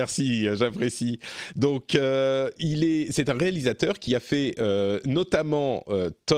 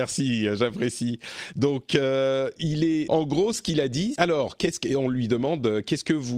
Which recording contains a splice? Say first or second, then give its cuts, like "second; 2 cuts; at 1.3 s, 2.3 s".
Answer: second; 2 cuts; at 3.1 s, 4.2 s